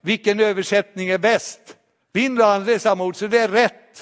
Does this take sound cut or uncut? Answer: cut